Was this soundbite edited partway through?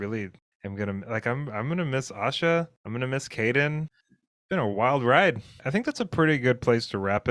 yes; 2 cuts; at 3.9 s, 5.6 s

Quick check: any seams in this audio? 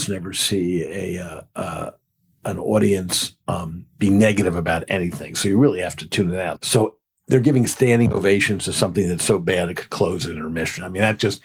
yes; 1 cut; at 6.6 s

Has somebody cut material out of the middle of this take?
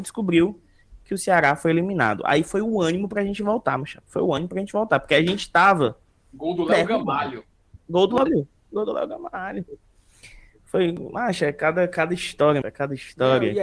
yes; 2 cuts; at 8.3 s, 12.6 s

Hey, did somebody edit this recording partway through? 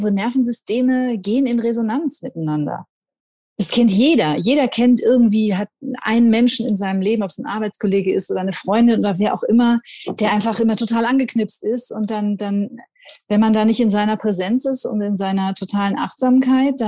no; 0 cuts

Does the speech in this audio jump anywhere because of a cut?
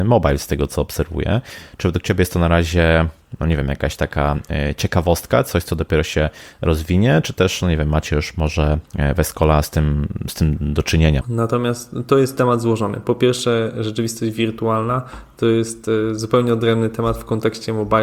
yes; 1 cut; at 11.2 s

